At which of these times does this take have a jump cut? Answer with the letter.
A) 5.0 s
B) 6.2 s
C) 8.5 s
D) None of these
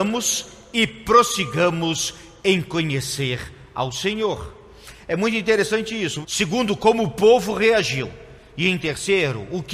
B